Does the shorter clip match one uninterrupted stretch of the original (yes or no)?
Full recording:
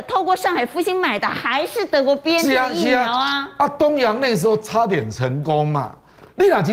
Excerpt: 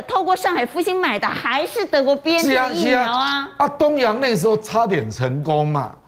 yes